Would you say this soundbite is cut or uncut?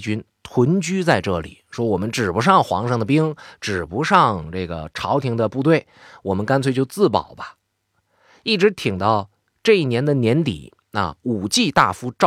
uncut